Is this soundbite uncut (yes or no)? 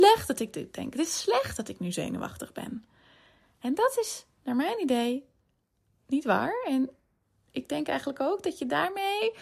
yes